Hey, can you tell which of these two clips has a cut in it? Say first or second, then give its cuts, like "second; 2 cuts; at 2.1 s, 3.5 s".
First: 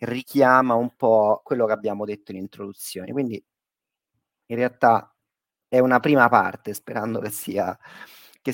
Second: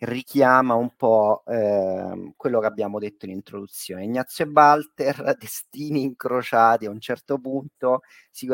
first; 2 cuts; at 1.4 s, 3.0 s